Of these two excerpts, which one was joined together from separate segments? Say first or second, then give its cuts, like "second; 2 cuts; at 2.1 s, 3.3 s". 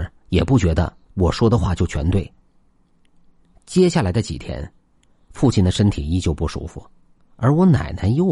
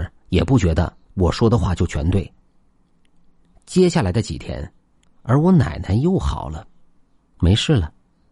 second; 1 cut; at 5.0 s